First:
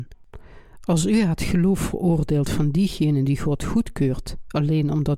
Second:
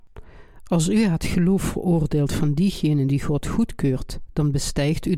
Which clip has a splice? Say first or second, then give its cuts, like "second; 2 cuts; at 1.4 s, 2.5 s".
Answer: second; 1 cut; at 4.3 s